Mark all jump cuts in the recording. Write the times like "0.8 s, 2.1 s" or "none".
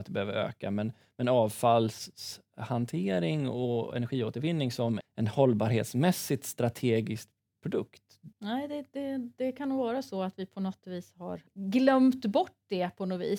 5.0 s, 8.3 s, 11.5 s

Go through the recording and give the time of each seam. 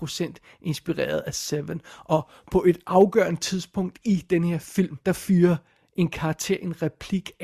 5.0 s

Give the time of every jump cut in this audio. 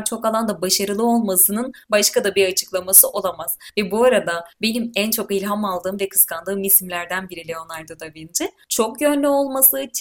none

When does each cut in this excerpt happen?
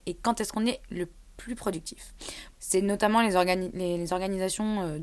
2.5 s

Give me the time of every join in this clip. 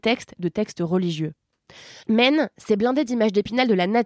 none

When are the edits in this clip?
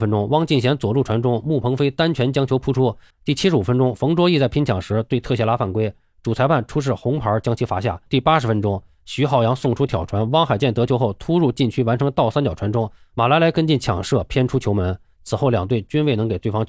3.1 s, 8.1 s

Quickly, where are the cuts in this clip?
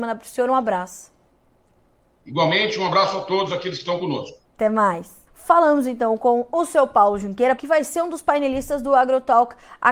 5.3 s, 7.6 s

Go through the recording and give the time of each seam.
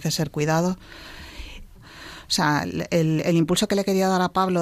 1.8 s

